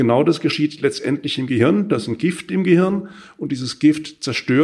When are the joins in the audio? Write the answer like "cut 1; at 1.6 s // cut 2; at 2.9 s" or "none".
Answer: none